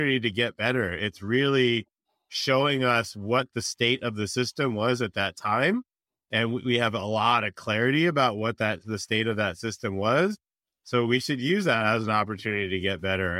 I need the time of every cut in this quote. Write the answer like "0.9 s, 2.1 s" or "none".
none